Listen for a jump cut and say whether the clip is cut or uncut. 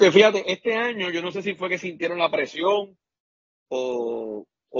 uncut